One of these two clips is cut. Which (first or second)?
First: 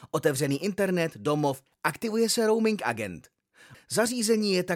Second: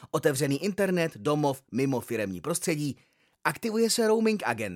first